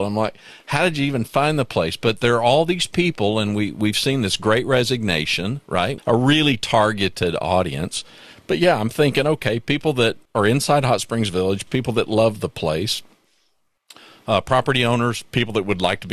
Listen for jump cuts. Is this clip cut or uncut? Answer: cut